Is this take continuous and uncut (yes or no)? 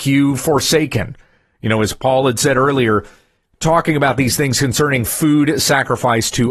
yes